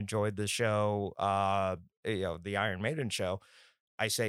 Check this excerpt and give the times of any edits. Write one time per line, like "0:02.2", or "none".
none